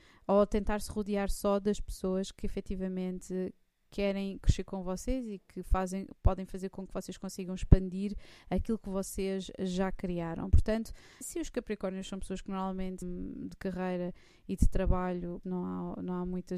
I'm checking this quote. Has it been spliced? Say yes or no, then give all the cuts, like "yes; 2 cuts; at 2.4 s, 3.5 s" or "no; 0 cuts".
yes; 3 cuts; at 11.2 s, 13.0 s, 15.4 s